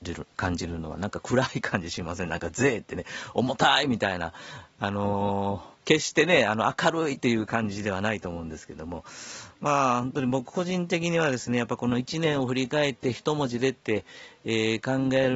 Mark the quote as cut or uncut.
cut